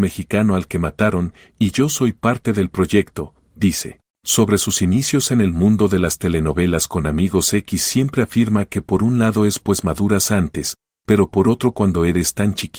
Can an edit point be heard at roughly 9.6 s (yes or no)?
yes